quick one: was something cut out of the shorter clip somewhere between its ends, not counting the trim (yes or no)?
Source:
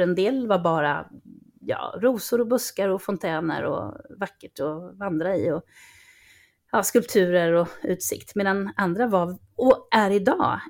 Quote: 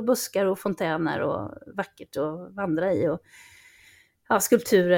no